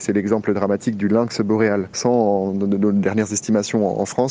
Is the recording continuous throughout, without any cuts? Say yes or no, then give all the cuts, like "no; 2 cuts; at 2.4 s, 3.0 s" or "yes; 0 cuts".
no; 1 cut; at 1.9 s